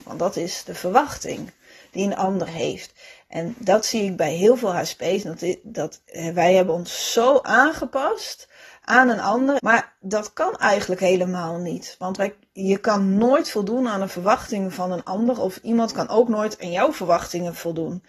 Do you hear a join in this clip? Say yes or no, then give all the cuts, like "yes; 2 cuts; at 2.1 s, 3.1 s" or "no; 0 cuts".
yes; 1 cut; at 9.6 s